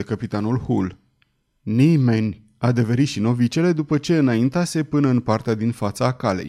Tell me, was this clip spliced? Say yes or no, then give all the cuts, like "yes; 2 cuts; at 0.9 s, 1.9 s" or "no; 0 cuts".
no; 0 cuts